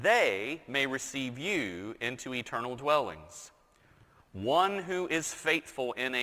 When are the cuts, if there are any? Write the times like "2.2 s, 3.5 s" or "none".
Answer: none